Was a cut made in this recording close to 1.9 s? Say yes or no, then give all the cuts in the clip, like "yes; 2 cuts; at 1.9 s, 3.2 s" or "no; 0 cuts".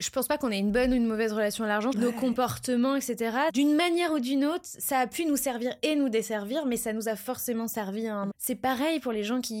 yes; 2 cuts; at 1.9 s, 8.3 s